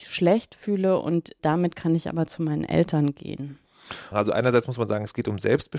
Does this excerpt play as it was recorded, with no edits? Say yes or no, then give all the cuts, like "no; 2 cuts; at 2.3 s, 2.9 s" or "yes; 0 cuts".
no; 1 cut; at 4.1 s